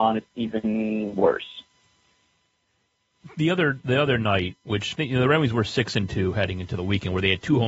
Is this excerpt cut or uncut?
uncut